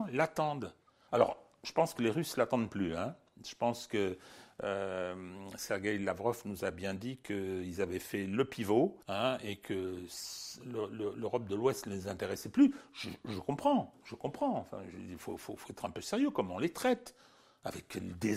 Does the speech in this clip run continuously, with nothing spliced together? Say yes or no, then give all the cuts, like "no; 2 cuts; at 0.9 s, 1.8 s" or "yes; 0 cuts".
no; 1 cut; at 9.0 s